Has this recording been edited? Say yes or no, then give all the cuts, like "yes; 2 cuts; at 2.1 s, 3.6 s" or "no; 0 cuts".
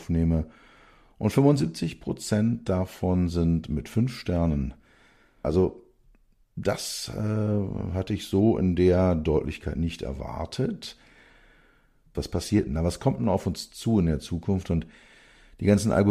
yes; 2 cuts; at 5.4 s, 12.1 s